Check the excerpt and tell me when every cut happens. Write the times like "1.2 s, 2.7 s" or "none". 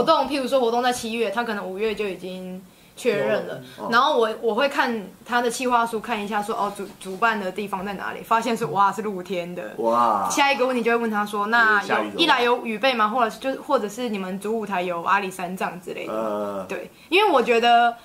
none

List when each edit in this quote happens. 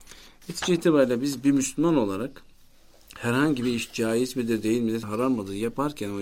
5.0 s

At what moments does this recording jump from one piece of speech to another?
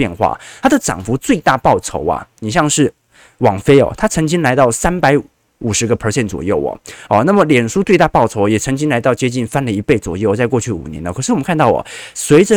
none

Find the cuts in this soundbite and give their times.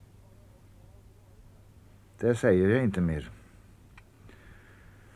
none

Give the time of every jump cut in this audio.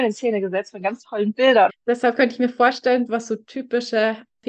1.7 s, 3.1 s

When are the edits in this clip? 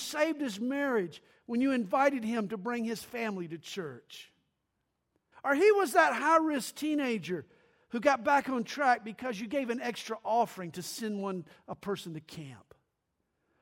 5.3 s

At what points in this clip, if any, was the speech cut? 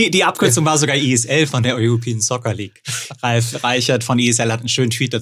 3.0 s

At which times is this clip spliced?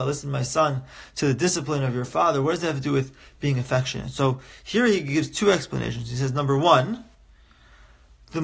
none

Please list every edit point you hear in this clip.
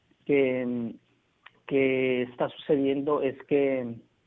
none

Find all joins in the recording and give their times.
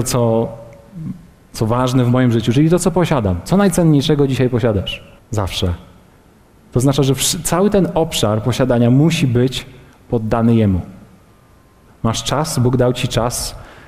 5.2 s, 11.9 s

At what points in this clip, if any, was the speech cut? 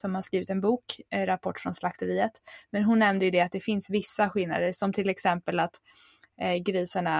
none

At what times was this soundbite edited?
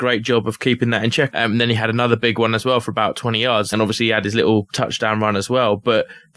1.3 s, 3.7 s

